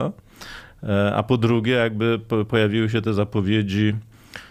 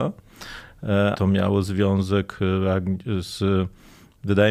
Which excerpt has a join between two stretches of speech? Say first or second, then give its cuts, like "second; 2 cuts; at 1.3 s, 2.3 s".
second; 1 cut; at 1.1 s